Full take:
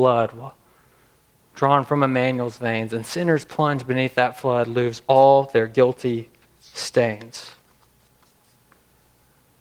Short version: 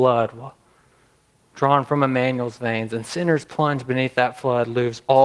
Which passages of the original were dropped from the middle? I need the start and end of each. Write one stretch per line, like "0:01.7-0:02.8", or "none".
none